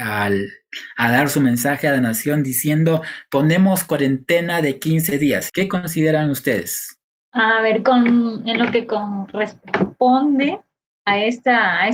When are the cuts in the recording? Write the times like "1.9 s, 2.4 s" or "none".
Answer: 5.5 s